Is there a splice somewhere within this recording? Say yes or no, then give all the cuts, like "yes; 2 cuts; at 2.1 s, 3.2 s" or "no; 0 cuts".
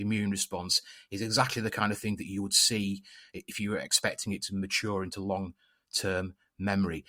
no; 0 cuts